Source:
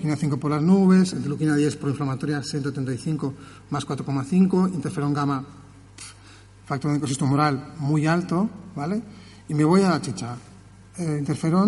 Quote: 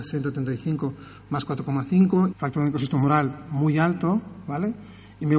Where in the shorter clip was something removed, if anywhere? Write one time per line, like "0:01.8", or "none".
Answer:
0:02.3